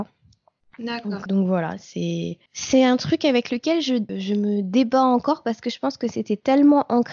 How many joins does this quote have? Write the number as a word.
three